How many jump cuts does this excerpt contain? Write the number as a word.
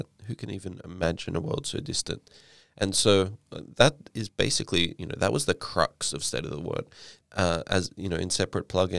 one